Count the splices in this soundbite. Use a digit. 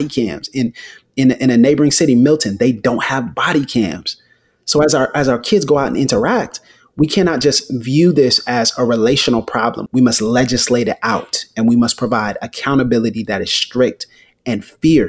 1